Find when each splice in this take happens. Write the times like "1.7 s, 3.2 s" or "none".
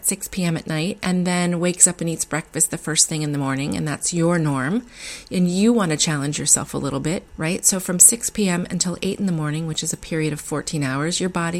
7.3 s